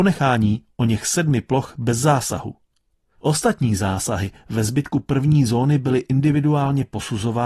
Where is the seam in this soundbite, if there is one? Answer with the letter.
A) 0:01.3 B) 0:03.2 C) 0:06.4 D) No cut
B